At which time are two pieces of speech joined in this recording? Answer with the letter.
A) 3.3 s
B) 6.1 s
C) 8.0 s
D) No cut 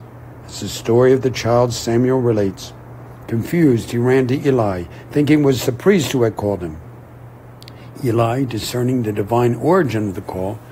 A